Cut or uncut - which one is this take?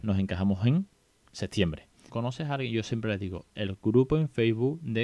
cut